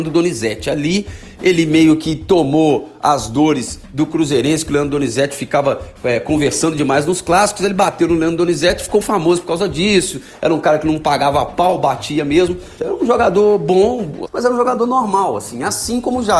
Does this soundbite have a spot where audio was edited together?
yes; 3 cuts; at 9.0 s, 12.8 s, 14.2 s

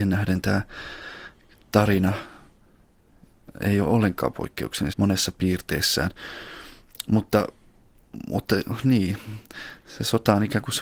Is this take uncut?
no; 1 cut; at 4.9 s

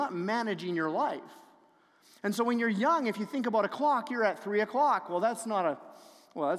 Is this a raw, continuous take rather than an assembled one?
yes; 0 cuts

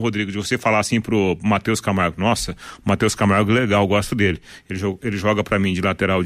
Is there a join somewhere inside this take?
no; 0 cuts

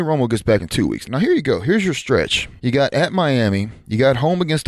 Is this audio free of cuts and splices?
no; 2 cuts; at 1.1 s, 2.6 s

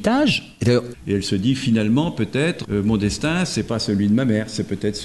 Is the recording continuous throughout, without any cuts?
no; 2 cuts; at 0.9 s, 2.6 s

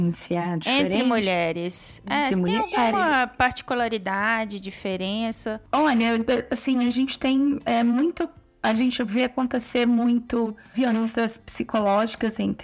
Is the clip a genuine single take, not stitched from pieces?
yes; 0 cuts

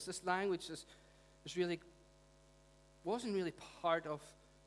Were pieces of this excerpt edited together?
no; 0 cuts

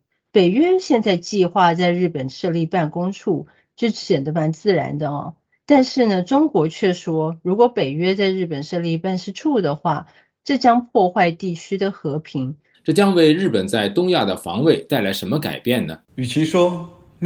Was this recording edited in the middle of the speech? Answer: yes; 2 cuts; at 12.7 s, 16.0 s

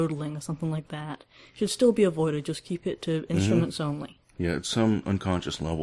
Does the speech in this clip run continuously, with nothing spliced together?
yes; 0 cuts

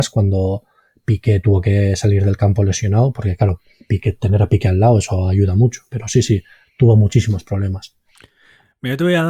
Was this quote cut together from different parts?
no; 0 cuts

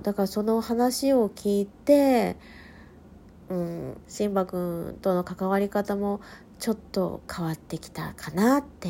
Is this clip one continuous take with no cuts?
no; 2 cuts; at 4.0 s, 7.2 s

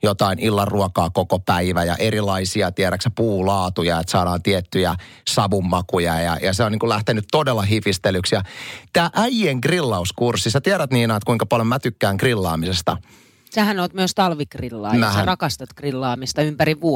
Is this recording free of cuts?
yes; 0 cuts

